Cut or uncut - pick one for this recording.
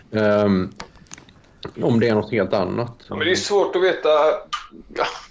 cut